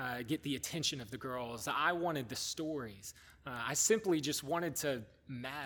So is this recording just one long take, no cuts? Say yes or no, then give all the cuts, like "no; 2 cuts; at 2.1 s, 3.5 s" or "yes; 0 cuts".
yes; 0 cuts